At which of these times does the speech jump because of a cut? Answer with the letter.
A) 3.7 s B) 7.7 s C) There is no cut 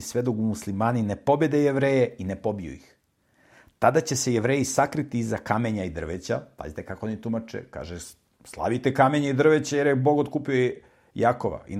C